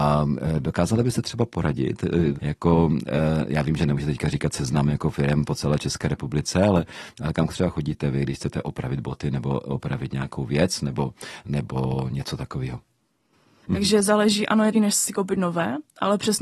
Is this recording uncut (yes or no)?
no